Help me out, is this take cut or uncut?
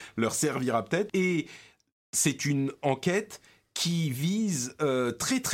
cut